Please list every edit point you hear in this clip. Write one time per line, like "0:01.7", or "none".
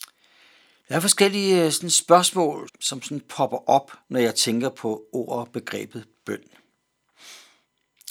0:02.7
0:04.0